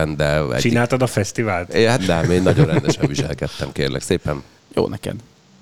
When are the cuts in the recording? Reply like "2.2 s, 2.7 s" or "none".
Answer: 2.0 s, 4.6 s